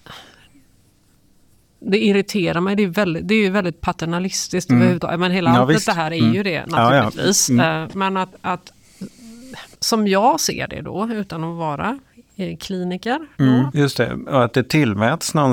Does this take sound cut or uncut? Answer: cut